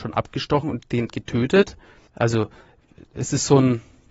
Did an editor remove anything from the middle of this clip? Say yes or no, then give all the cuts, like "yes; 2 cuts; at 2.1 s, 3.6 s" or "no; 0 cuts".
yes; 1 cut; at 2.1 s